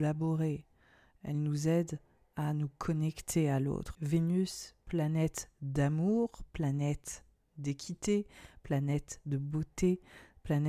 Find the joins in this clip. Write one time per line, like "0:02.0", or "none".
0:03.9